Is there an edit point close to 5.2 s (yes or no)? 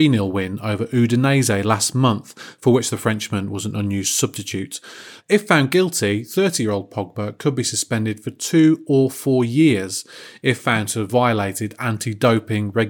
yes